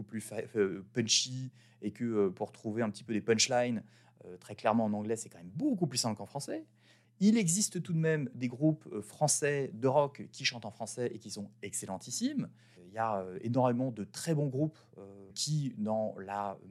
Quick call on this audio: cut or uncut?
cut